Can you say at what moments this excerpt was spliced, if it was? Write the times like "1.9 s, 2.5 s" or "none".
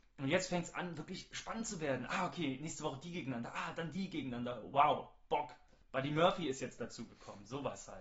none